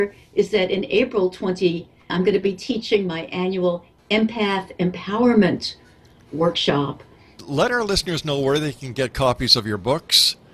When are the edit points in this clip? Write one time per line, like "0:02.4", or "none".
0:02.1
0:07.4